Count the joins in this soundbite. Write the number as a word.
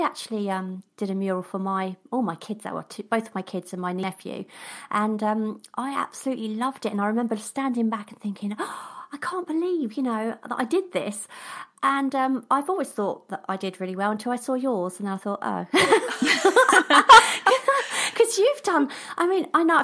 zero